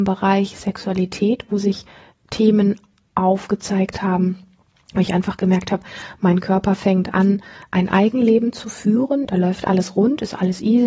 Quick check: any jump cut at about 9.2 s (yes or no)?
yes